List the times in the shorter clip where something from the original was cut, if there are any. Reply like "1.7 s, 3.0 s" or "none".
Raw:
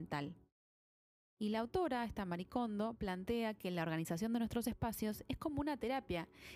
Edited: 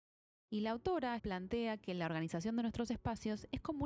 1.2 s